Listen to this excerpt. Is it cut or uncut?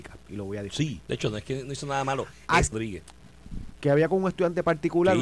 cut